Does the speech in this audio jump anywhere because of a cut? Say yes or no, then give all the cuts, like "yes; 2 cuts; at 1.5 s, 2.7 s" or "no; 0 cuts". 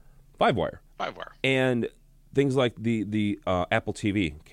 yes; 1 cut; at 0.9 s